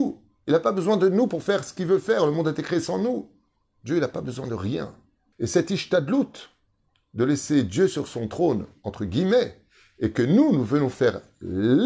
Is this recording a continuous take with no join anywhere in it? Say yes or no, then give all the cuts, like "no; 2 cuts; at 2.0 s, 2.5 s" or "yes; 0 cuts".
no; 1 cut; at 5.3 s